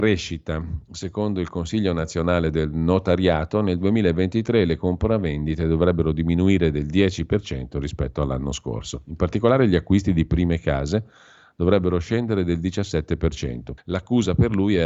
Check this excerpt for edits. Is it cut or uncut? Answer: cut